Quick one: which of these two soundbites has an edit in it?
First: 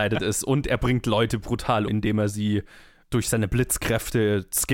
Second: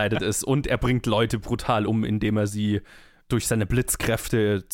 first; 1 cut; at 1.9 s

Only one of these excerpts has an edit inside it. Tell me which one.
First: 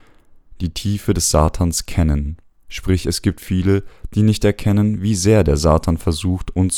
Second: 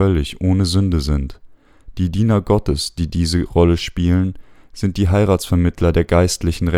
first; 1 cut; at 2.6 s

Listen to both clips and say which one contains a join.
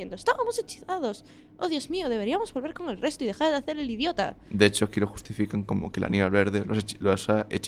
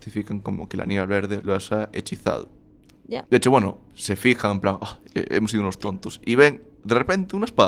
second; 2 cuts; at 1.4 s, 3.3 s

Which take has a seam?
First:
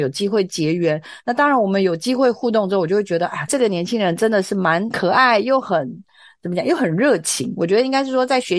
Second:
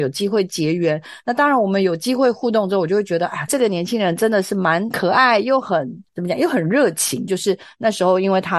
second; 2 cuts; at 6.1 s, 7.3 s

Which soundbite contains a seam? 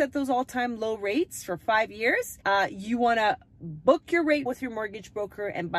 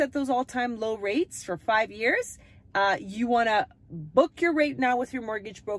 first; 2 cuts; at 2.4 s, 4.5 s

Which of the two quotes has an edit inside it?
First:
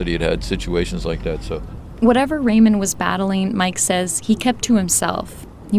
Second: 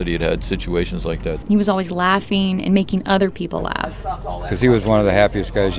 second; 1 cut; at 1.4 s

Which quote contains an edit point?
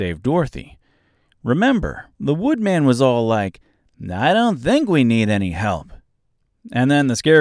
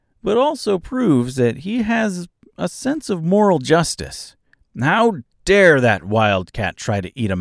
first; 1 cut; at 2.1 s

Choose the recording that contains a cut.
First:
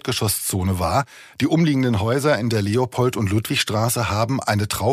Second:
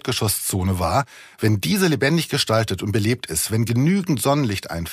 first; 1 cut; at 1.3 s

